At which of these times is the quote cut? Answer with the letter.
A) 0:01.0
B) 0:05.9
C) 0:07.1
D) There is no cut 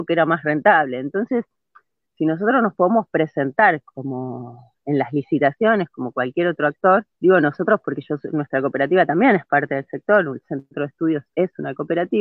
C